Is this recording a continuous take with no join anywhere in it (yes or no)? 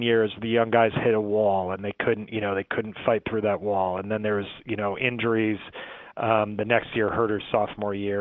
yes